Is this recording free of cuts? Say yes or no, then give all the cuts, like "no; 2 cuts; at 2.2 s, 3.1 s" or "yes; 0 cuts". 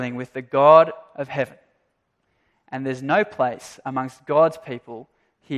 no; 1 cut; at 2.5 s